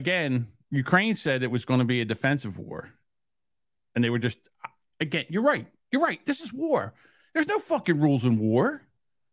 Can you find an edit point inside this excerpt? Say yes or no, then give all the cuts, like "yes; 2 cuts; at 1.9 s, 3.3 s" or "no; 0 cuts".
no; 0 cuts